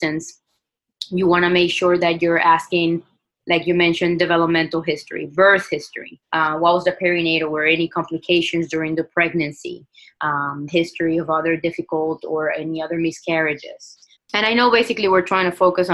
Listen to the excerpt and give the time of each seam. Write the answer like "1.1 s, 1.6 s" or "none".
6.2 s, 10.7 s, 14.2 s